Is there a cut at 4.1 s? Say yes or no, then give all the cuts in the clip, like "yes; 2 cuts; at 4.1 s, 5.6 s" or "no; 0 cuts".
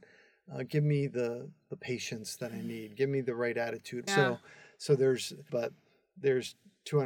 yes; 2 cuts; at 4.1 s, 5.5 s